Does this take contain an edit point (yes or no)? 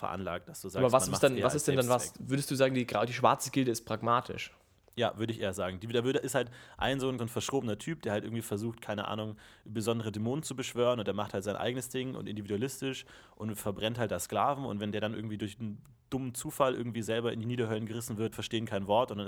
yes